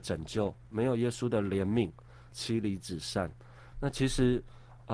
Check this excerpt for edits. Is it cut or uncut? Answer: cut